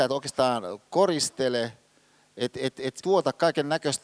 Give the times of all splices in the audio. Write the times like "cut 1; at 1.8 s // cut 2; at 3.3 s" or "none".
cut 1; at 3.0 s

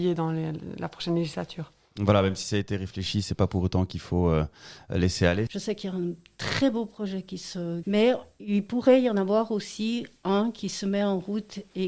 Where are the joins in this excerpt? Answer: cut 1; at 5.5 s // cut 2; at 7.8 s

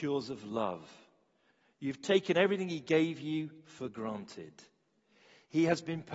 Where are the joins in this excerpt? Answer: none

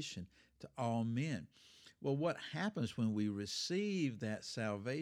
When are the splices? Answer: none

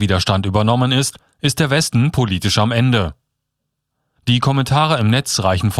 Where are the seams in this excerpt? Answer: cut 1; at 4.2 s

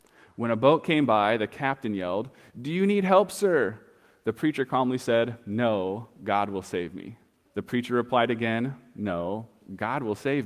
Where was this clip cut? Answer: cut 1; at 7.5 s

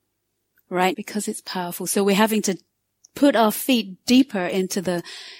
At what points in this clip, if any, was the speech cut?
cut 1; at 0.9 s

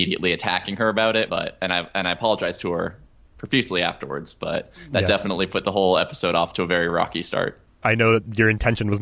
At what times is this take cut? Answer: cut 1; at 1.3 s

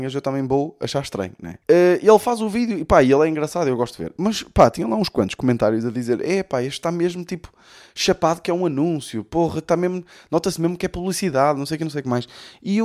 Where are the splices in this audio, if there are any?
cut 1; at 1.6 s

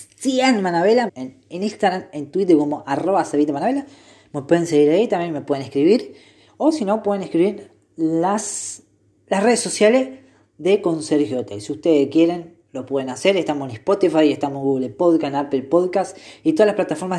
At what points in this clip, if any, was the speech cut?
cut 1; at 1.1 s

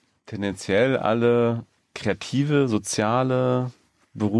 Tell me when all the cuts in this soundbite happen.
none

